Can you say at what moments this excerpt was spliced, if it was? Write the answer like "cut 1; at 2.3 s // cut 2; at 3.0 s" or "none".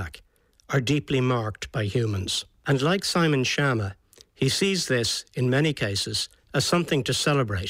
none